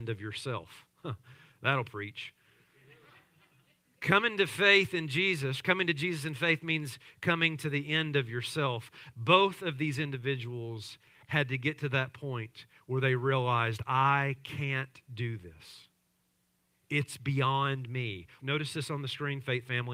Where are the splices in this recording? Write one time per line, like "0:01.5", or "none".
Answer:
0:09.1
0:18.4